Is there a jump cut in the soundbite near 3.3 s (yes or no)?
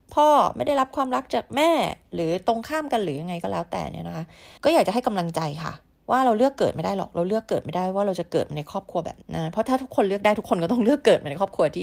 no